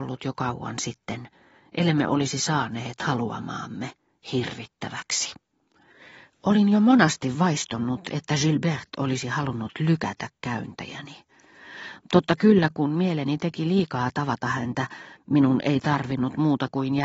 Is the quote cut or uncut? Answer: uncut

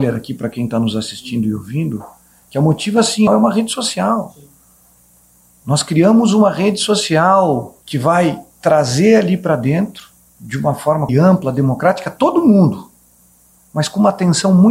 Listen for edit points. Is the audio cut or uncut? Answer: cut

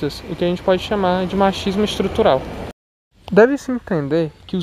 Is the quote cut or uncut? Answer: uncut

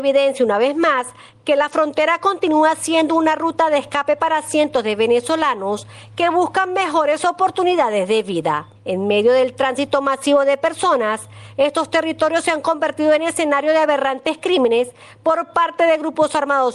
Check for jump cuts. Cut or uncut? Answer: cut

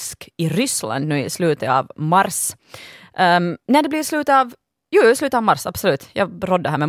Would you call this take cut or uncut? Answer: uncut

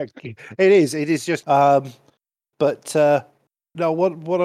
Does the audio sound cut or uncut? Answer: cut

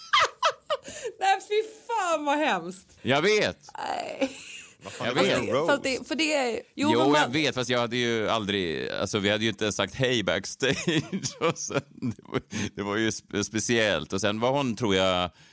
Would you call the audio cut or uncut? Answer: uncut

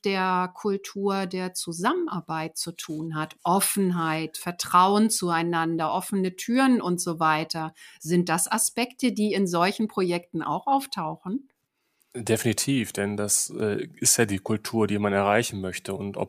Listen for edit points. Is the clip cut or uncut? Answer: uncut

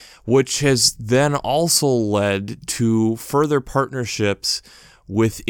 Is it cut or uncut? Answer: uncut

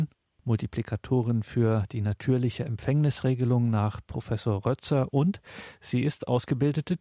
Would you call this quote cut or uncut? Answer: uncut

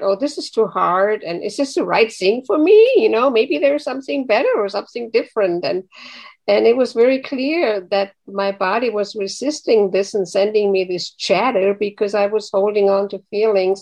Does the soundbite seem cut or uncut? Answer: uncut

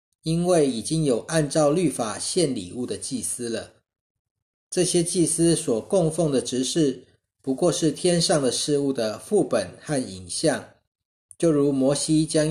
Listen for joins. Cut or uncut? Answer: uncut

